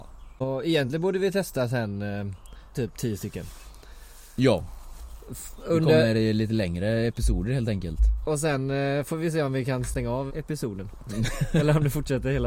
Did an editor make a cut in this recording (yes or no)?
yes